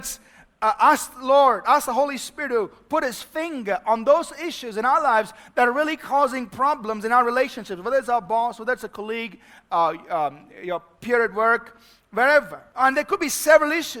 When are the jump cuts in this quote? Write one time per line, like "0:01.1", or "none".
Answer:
none